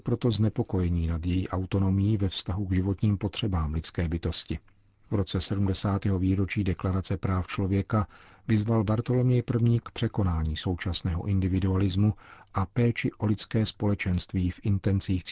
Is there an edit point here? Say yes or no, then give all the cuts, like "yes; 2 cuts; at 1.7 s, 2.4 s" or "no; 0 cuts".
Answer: no; 0 cuts